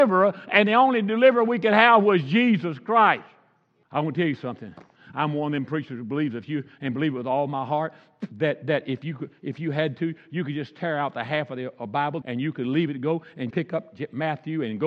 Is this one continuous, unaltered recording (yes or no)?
no